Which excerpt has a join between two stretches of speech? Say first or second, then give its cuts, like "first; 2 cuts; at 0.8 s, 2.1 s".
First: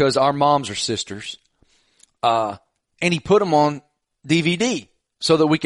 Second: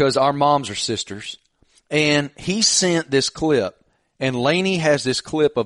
second; 1 cut; at 1.7 s